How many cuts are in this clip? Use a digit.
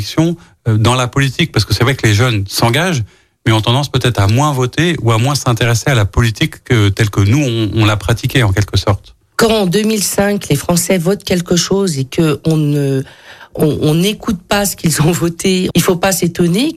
2